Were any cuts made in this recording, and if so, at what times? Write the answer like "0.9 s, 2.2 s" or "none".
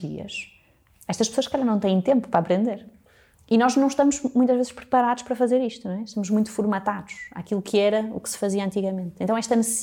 3.3 s

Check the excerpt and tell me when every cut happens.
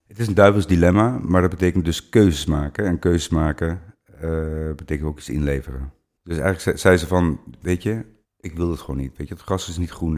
6.2 s, 8.2 s

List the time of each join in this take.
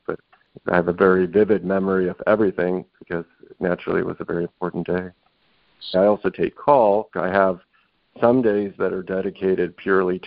5.9 s, 7.1 s

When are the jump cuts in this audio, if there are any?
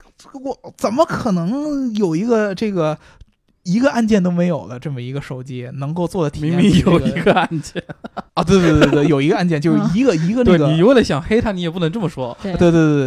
8.3 s

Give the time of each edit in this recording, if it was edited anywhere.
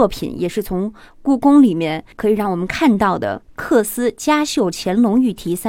none

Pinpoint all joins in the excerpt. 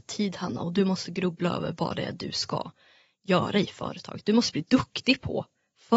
none

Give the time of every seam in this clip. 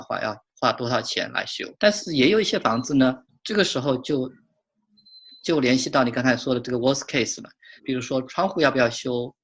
1.8 s, 3.3 s, 7.8 s

